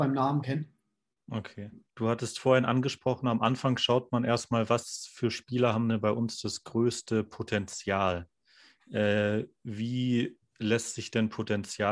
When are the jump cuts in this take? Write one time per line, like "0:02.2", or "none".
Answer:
0:01.9